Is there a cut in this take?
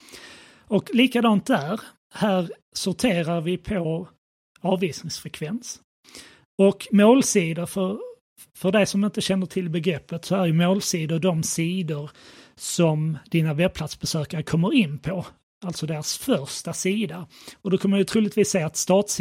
no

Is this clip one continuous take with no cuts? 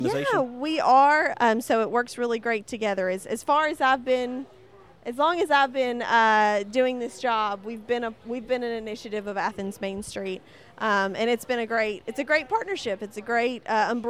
no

